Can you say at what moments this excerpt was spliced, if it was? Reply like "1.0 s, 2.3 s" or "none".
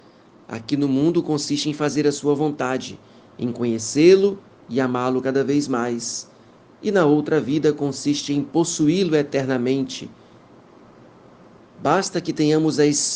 11.6 s